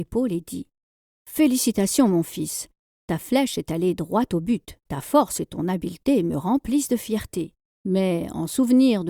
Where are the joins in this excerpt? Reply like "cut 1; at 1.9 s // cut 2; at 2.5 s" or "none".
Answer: cut 1; at 4.9 s // cut 2; at 7.7 s